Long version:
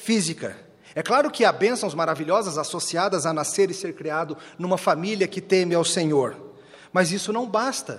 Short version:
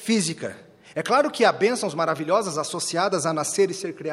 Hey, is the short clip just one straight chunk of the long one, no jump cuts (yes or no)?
yes